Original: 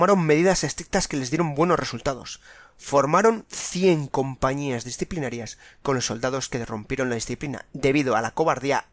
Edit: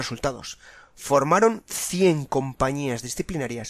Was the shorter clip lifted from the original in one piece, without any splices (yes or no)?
yes